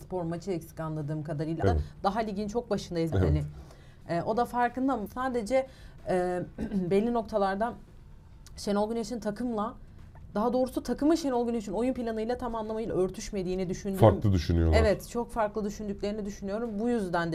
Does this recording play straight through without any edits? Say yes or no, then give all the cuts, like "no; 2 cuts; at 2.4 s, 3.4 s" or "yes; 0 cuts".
no; 3 cuts; at 1.6 s, 3.1 s, 5.1 s